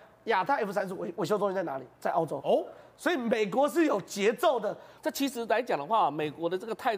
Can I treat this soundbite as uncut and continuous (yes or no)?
no